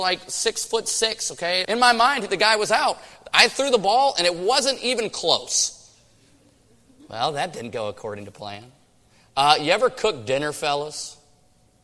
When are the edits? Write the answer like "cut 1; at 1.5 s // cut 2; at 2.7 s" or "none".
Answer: cut 1; at 1.6 s